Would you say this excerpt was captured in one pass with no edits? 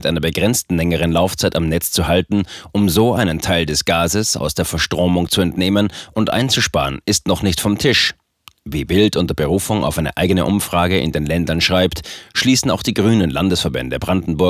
yes; 0 cuts

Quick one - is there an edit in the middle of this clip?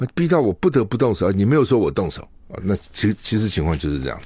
no; 0 cuts

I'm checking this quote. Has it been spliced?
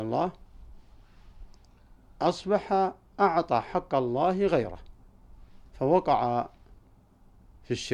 yes; 1 cut; at 5.7 s

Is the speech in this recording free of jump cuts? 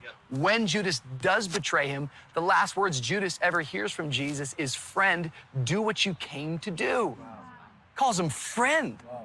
yes; 0 cuts

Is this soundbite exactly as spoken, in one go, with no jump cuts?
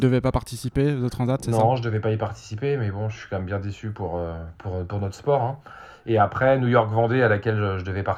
yes; 0 cuts

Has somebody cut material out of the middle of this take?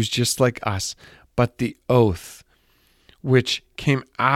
no; 0 cuts

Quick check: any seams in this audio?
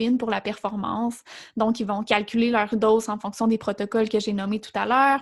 no; 0 cuts

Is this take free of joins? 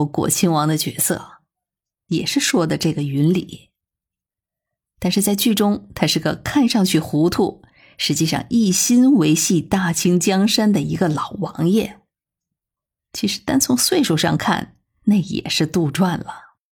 yes; 0 cuts

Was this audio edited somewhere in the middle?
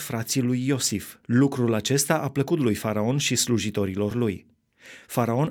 yes; 1 cut; at 1.2 s

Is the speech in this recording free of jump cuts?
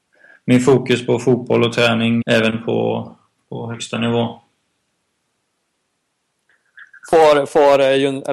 no; 1 cut; at 2.2 s

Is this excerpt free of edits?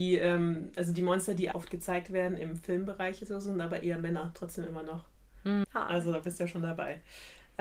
no; 2 cuts; at 1.5 s, 5.6 s

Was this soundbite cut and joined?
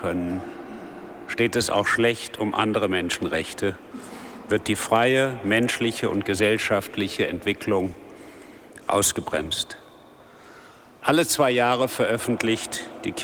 no; 0 cuts

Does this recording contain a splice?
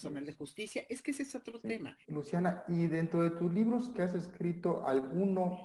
yes; 1 cut; at 2.0 s

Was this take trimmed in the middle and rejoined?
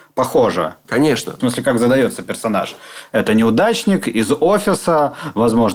no; 0 cuts

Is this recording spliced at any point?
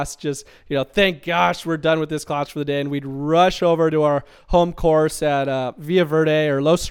no; 0 cuts

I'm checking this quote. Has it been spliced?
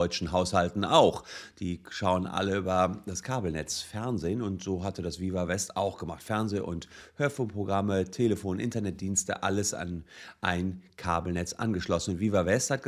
no; 0 cuts

